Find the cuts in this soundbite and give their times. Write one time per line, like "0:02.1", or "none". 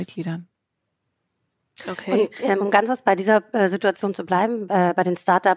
none